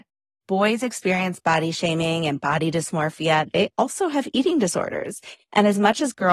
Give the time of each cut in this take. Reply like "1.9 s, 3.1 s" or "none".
none